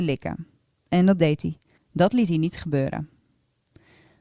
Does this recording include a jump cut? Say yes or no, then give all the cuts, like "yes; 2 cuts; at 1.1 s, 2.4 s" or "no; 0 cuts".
yes; 1 cut; at 1.8 s